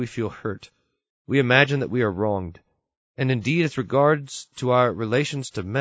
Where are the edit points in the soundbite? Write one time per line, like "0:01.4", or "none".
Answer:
none